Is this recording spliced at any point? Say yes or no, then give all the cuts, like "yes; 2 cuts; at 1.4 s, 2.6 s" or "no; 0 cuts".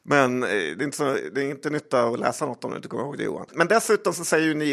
yes; 1 cut; at 3.5 s